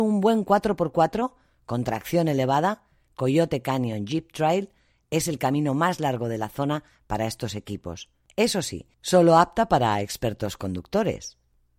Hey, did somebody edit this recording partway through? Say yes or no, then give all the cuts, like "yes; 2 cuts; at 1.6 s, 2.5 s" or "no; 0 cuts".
no; 0 cuts